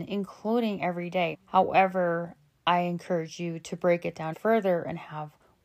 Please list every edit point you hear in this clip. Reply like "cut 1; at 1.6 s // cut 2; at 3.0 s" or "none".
cut 1; at 1.3 s // cut 2; at 4.3 s